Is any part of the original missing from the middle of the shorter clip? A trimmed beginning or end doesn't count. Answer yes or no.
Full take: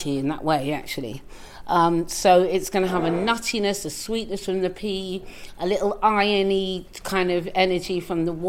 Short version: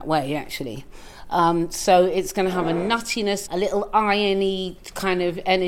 yes